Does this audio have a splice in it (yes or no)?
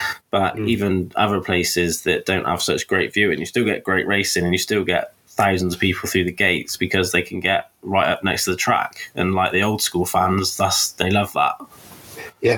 no